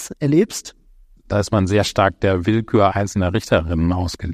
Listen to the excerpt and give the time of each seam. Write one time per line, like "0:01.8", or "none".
0:01.2
0:02.9